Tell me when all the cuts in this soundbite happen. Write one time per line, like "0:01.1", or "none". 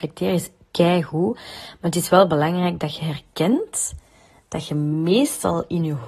none